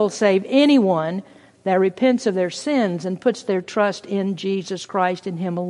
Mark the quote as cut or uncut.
uncut